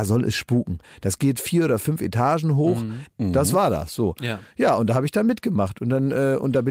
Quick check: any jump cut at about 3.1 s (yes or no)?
yes